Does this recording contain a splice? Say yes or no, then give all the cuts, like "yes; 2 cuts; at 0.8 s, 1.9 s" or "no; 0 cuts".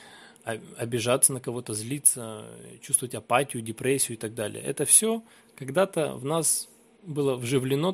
no; 0 cuts